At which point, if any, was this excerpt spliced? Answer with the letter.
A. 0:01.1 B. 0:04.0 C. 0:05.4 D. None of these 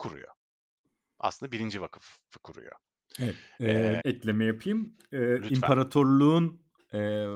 B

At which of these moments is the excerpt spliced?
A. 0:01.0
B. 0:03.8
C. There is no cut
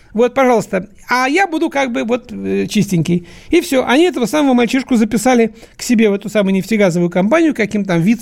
C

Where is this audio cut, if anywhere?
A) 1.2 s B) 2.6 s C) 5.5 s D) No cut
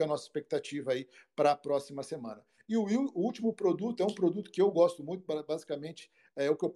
D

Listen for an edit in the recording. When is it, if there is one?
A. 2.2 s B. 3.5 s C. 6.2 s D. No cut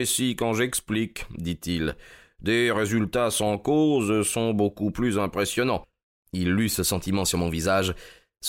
C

